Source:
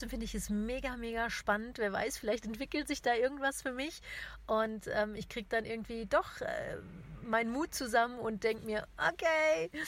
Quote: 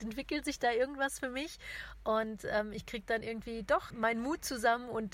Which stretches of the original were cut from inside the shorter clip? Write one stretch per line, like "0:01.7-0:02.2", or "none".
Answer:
0:06.3-0:07.2